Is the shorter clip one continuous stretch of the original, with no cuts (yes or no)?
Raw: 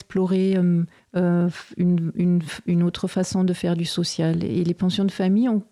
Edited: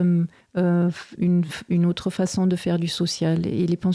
no